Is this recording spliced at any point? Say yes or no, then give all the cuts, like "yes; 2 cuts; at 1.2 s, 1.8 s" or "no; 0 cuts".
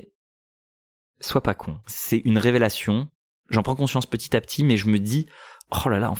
yes; 1 cut; at 1.8 s